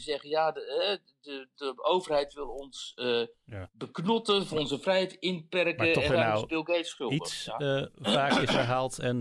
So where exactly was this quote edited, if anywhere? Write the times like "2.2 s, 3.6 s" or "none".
1.5 s, 6.1 s

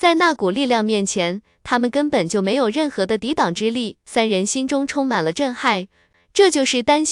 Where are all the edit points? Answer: none

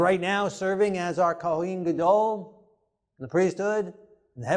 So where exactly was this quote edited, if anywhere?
none

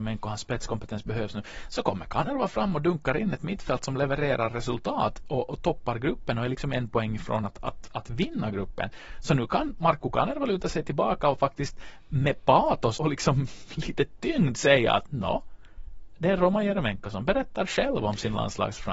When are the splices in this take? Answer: 13.0 s

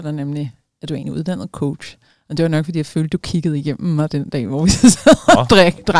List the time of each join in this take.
none

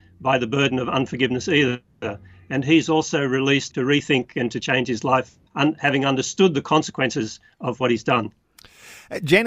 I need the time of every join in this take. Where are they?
3.7 s, 5.5 s

